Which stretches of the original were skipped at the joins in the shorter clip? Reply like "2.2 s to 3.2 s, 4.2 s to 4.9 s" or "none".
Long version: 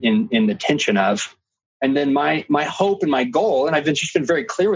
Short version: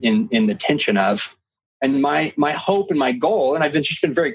1.9 s to 2.1 s